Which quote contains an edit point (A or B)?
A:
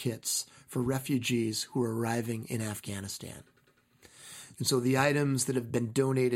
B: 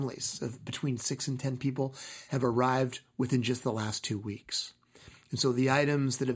A